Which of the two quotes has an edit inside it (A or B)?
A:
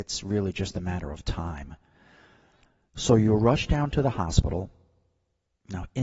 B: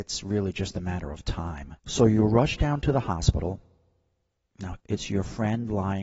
B